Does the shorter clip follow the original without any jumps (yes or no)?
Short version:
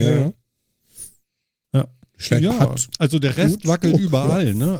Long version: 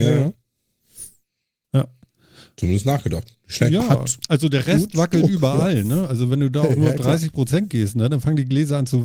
no